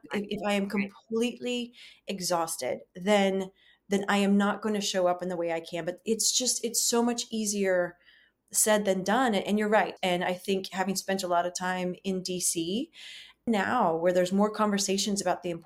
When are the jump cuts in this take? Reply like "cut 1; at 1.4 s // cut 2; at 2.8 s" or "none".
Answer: cut 1; at 10.0 s // cut 2; at 13.5 s